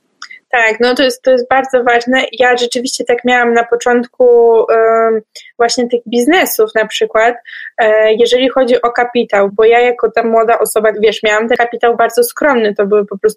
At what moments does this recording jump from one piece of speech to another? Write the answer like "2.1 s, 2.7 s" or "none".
9.5 s, 10.9 s